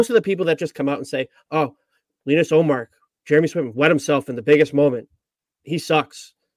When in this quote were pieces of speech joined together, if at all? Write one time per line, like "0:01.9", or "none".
none